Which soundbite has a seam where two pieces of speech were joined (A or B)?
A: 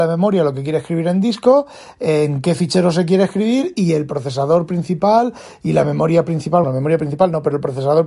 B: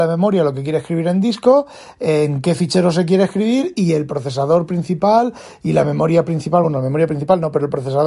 A